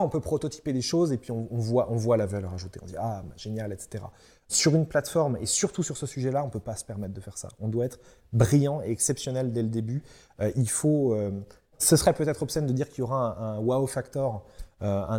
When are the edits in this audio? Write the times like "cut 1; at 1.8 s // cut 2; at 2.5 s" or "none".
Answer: cut 1; at 11.7 s